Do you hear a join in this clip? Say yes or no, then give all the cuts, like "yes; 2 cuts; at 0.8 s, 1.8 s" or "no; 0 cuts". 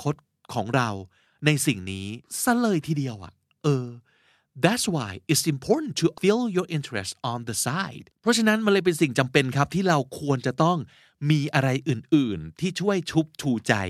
yes; 2 cuts; at 6.2 s, 8.1 s